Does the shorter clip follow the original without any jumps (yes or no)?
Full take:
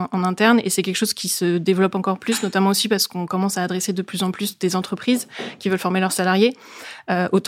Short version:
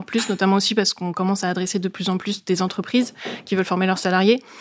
yes